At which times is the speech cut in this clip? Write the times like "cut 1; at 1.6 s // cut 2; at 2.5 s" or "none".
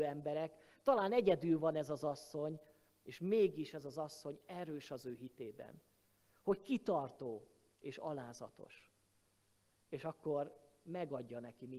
none